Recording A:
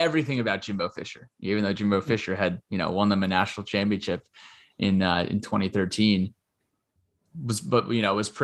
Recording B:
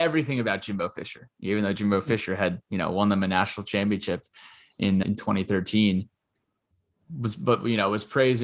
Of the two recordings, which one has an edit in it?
B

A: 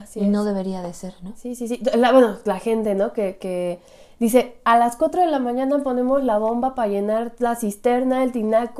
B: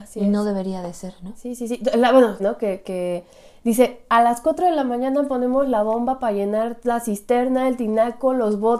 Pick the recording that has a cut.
B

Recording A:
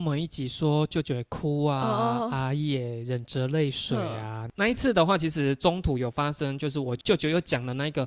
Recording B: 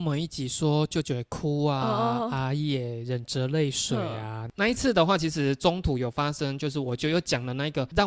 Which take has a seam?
B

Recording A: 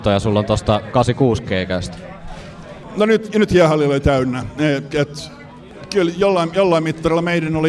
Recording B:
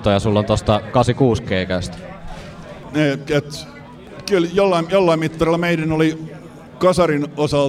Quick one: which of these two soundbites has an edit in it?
B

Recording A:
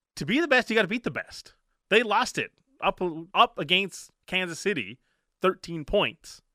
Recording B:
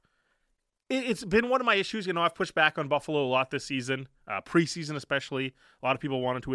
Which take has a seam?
A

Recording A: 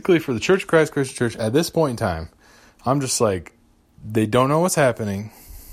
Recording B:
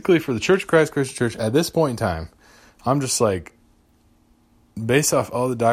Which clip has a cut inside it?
A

